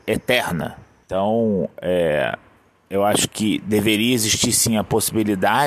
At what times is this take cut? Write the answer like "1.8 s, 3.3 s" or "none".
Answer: 1.0 s